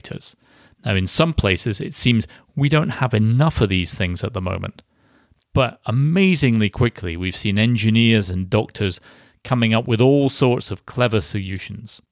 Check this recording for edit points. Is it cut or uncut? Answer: uncut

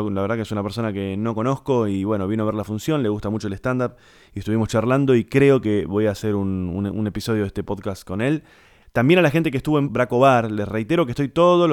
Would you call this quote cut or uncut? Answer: cut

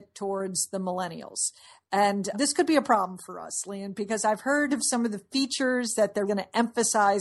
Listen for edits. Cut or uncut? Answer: cut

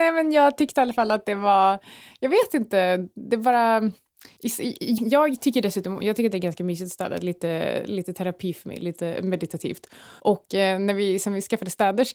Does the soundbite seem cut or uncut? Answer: cut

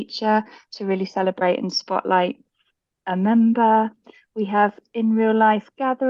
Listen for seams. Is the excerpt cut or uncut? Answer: uncut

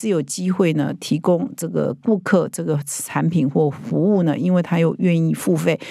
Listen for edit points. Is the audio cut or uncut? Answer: uncut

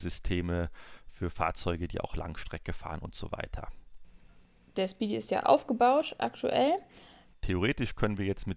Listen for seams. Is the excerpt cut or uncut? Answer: cut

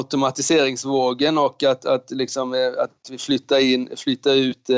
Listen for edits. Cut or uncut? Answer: uncut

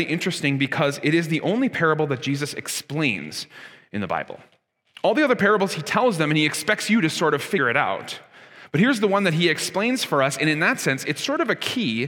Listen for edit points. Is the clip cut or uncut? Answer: uncut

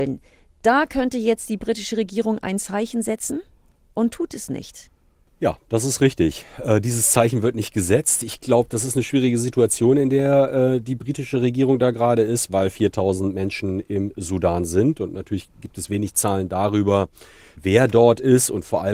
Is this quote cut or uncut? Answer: uncut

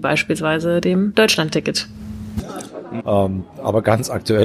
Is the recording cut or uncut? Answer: cut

